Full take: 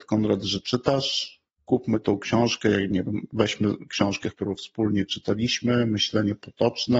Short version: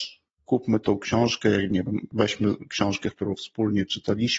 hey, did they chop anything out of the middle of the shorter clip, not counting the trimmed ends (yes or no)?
no